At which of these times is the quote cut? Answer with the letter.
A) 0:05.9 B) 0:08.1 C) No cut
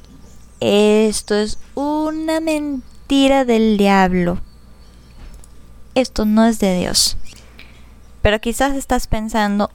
A